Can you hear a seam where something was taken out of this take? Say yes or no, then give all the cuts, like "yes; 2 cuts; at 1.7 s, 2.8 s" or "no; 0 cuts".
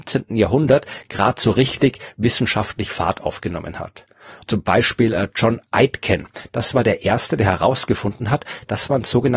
yes; 1 cut; at 4.4 s